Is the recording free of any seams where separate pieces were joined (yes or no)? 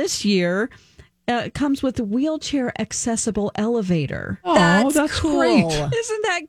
yes